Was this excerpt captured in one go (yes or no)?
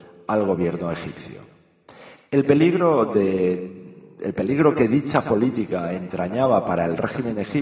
yes